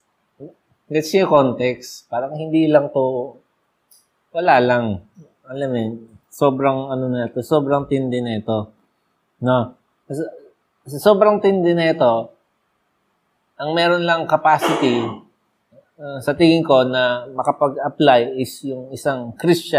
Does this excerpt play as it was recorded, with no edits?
yes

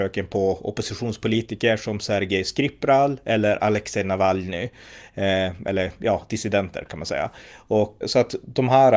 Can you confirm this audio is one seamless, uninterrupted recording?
no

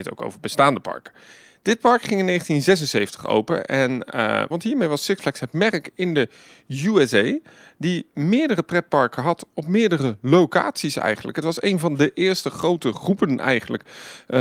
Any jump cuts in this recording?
yes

